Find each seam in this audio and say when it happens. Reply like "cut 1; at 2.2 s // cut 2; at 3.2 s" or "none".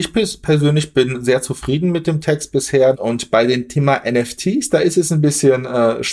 cut 1; at 2.9 s

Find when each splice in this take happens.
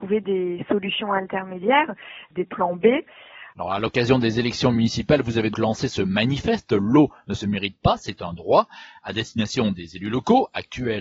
cut 1; at 3.5 s // cut 2; at 5.5 s

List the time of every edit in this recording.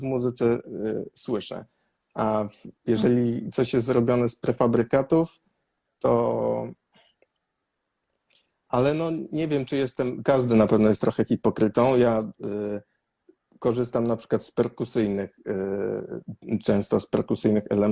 cut 1; at 10.2 s

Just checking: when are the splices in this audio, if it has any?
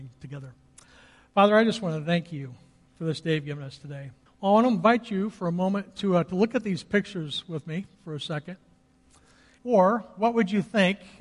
cut 1; at 4.3 s // cut 2; at 9.6 s

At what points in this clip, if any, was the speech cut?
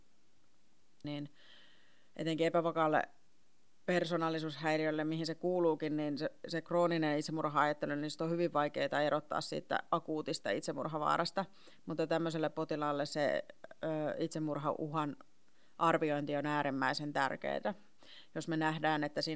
cut 1; at 1.0 s

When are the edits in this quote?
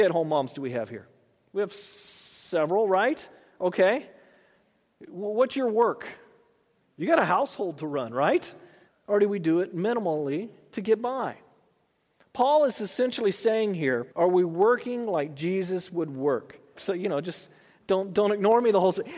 cut 1; at 8.9 s // cut 2; at 14.1 s // cut 3; at 16.8 s

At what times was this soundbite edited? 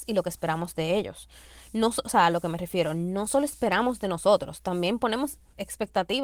none

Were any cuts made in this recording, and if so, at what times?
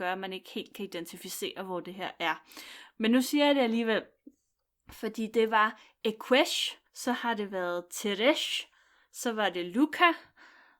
cut 1; at 6.9 s

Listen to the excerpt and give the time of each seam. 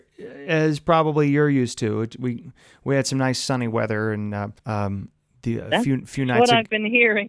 cut 1; at 4.6 s

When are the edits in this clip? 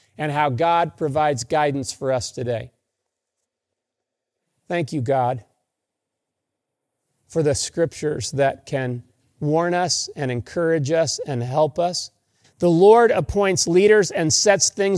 cut 1; at 12.4 s

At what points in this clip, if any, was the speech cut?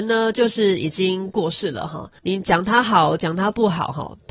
cut 1; at 2.2 s

